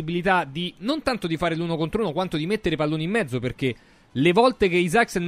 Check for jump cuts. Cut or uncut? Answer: uncut